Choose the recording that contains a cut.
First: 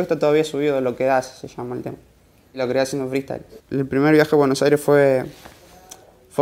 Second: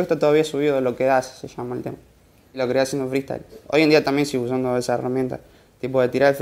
first; 1 cut; at 3.6 s

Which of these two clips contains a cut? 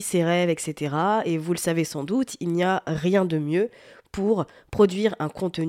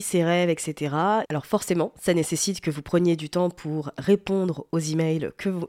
second; 1 cut; at 1.2 s

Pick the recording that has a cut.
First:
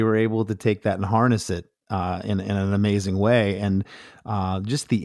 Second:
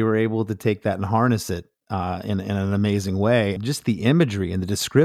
second; 1 cut; at 3.6 s

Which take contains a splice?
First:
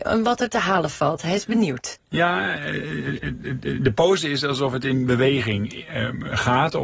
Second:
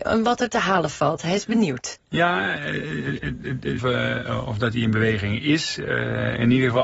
second; 1 cut; at 3.8 s

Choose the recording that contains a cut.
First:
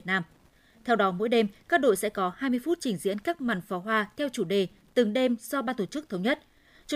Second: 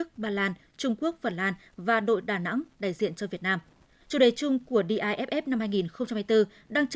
second; 1 cut; at 4.0 s

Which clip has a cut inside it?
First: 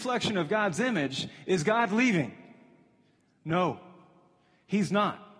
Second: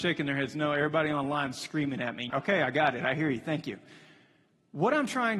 second; 1 cut; at 2.3 s

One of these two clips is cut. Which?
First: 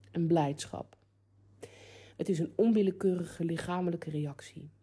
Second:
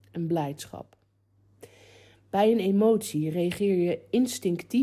first; 1 cut; at 2.1 s

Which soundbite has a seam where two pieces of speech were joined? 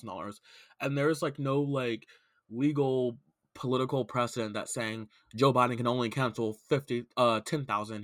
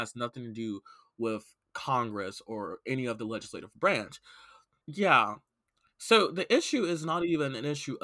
second; 1 cut; at 4.8 s

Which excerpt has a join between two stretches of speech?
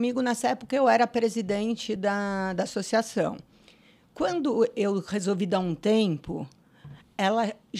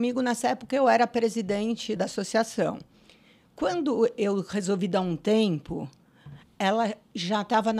second; 1 cut; at 2.0 s

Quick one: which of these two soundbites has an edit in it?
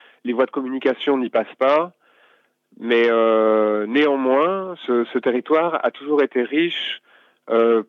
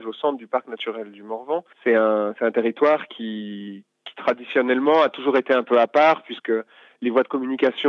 second; 1 cut; at 1.7 s

